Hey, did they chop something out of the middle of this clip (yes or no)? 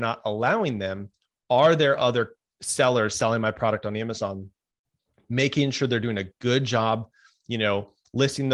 no